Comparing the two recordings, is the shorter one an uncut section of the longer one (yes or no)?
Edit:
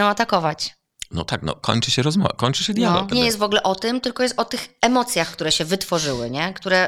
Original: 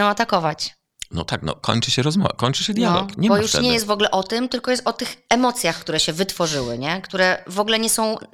no